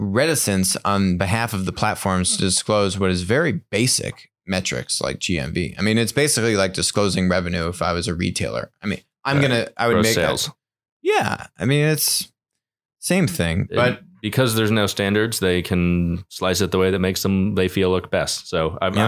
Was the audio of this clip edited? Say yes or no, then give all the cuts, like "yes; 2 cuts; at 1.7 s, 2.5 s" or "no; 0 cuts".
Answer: no; 0 cuts